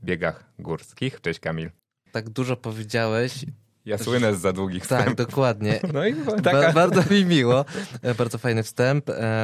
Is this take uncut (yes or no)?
no